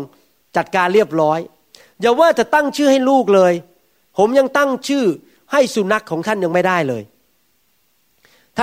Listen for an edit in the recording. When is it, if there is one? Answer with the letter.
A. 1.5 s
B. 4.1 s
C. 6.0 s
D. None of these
C